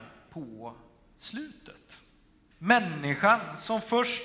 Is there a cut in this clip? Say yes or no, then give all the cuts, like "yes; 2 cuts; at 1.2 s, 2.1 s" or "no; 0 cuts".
yes; 1 cut; at 2.5 s